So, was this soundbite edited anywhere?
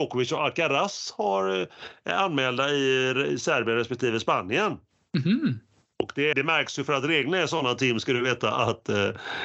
yes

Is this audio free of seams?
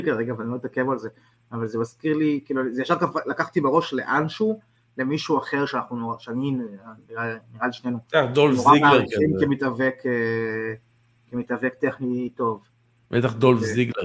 yes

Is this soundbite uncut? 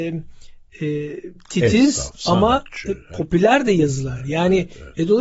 yes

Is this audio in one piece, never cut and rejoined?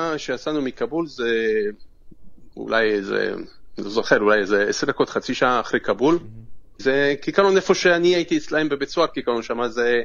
no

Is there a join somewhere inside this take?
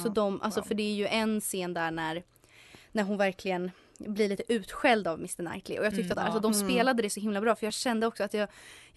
yes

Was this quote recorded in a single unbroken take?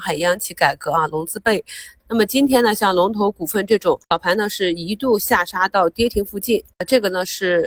no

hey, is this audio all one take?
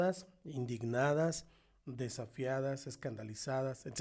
yes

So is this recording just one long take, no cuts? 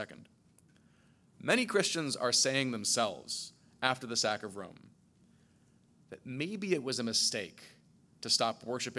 yes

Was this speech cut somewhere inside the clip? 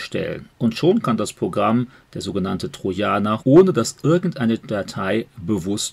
yes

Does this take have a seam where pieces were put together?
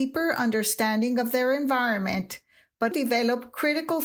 yes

